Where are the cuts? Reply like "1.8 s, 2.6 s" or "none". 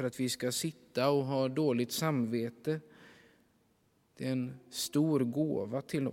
none